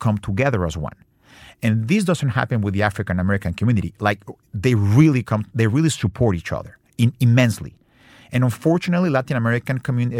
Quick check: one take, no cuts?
yes; 0 cuts

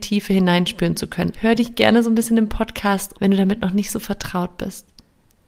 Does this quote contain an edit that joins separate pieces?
yes; 2 cuts; at 1.3 s, 3.1 s

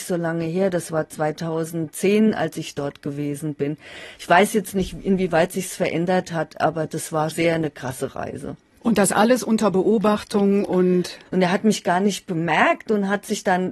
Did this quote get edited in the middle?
yes; 2 cuts; at 7.3 s, 11.3 s

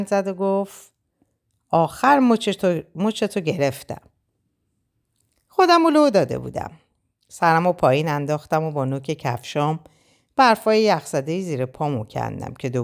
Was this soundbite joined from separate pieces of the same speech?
no; 0 cuts

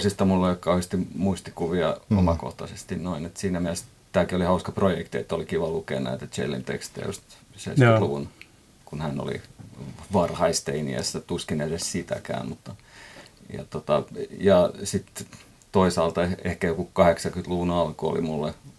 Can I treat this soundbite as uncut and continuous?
yes; 0 cuts

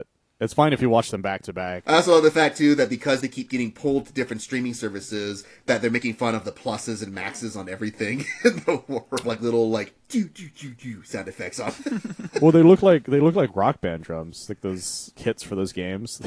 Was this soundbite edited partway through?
yes; 1 cut; at 9.2 s

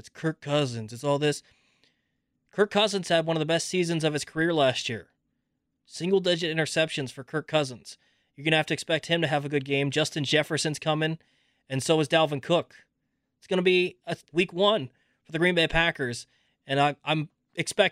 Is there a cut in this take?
yes; 1 cut; at 14.3 s

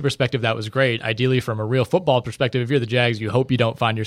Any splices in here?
no; 0 cuts

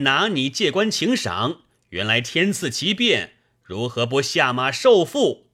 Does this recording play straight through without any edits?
yes; 0 cuts

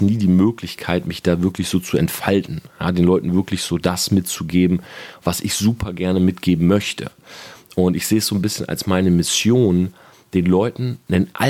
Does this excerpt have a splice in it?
no; 0 cuts

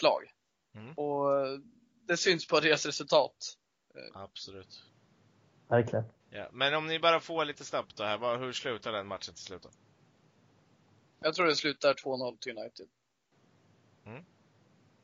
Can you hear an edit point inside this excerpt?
yes; 1 cut; at 6.2 s

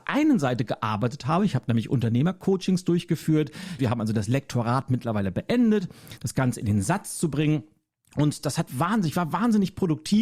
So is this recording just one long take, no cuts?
no; 2 cuts; at 3.8 s, 6.2 s

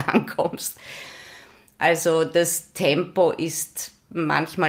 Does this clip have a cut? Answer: no; 0 cuts

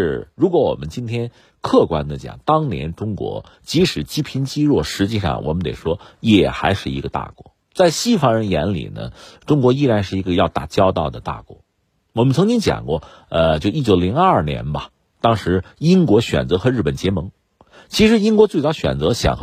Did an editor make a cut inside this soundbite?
no; 0 cuts

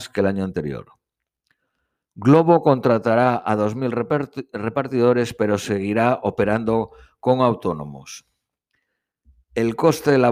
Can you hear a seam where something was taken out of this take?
no; 0 cuts

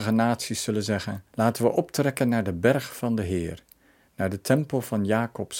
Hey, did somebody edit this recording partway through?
yes; 1 cut; at 1.3 s

